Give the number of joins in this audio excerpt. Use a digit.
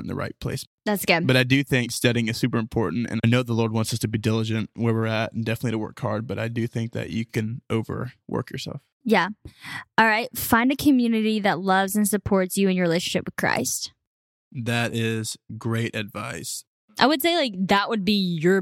0